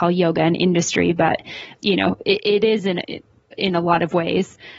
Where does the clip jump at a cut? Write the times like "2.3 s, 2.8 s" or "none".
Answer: none